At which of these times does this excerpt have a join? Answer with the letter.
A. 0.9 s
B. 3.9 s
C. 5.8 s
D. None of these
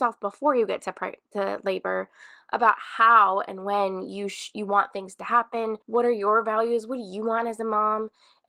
C